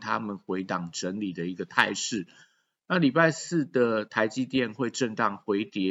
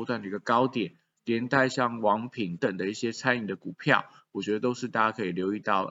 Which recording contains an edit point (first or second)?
second